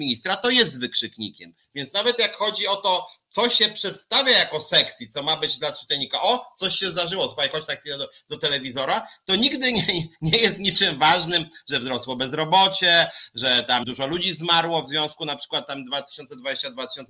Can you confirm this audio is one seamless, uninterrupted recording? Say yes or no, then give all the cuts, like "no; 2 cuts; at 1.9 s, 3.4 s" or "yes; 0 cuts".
no; 1 cut; at 13.8 s